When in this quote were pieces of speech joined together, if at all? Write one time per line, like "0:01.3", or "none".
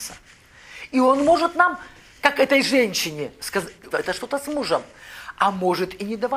0:03.9

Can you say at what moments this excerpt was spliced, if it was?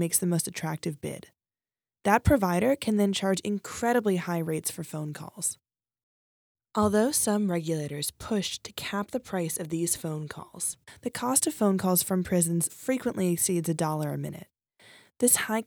0:12.7

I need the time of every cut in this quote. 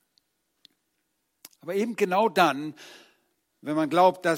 none

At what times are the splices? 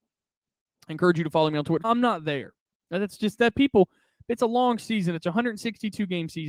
0:01.8

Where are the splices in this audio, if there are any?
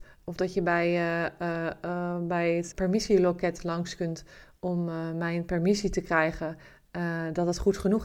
0:02.7

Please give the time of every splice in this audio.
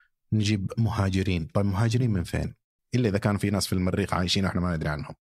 0:02.8

